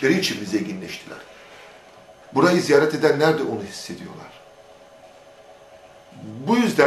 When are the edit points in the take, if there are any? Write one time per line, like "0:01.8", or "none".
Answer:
0:02.2